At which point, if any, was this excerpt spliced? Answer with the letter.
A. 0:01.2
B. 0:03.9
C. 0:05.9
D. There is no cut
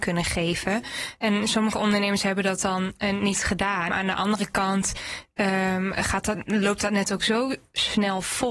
B